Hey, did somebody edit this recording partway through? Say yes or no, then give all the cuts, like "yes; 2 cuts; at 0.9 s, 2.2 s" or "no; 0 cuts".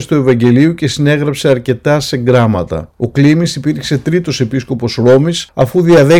no; 0 cuts